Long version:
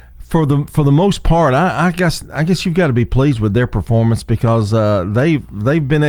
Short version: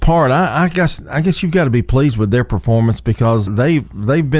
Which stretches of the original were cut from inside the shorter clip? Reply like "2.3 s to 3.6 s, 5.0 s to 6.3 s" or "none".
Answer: 4.7 s to 5.0 s